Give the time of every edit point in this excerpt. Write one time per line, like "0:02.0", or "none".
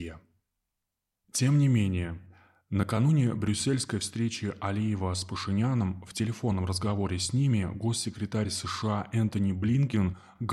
0:01.2

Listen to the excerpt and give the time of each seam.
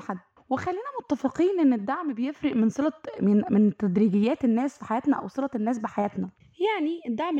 none

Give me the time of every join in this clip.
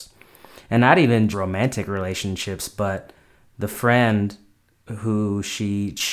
0:01.3

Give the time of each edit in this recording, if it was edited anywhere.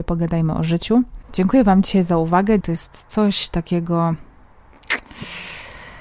0:01.3
0:02.6

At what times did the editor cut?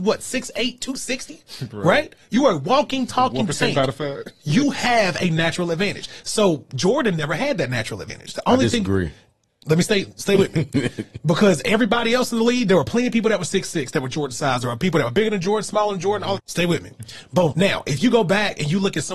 0:16.4
0:17.5

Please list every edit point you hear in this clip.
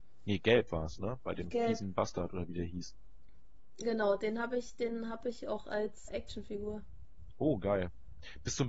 0:06.1

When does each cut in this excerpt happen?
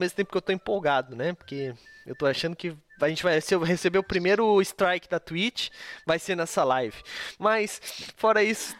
none

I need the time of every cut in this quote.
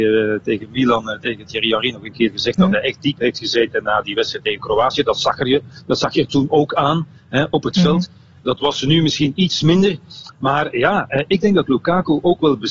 none

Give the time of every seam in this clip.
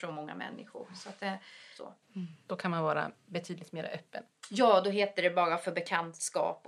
0:02.0

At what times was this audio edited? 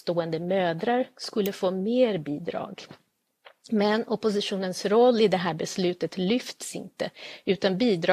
none

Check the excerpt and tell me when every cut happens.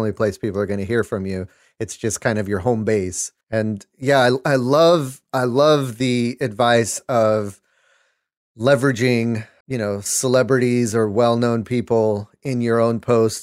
0:03.4
0:09.6

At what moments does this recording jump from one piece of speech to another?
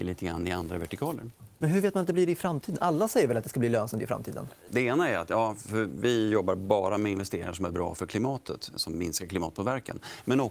0:01.6
0:04.7
0:08.8

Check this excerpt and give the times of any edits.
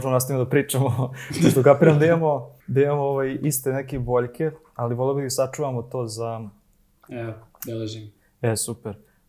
0:02.6

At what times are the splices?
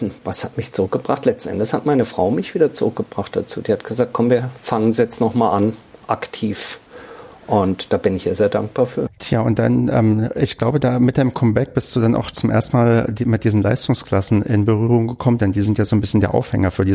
0:09.1

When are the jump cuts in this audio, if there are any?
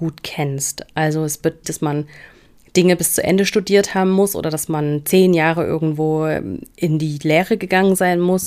0:01.6

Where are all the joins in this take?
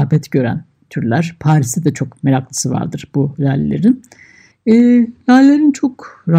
0:04.5

